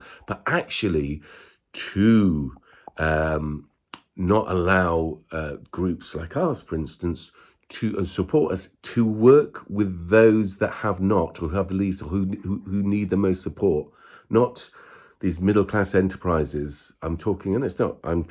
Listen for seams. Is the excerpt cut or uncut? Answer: uncut